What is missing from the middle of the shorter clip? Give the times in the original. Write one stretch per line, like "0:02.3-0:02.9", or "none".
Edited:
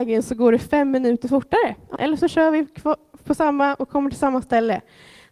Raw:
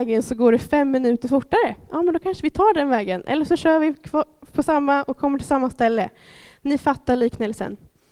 0:02.0-0:03.2